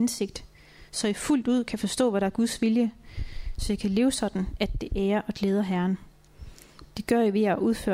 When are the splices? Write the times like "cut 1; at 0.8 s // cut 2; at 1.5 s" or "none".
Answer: none